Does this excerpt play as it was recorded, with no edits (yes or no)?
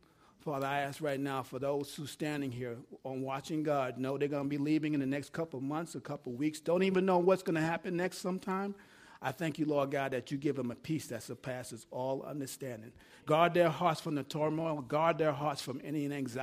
yes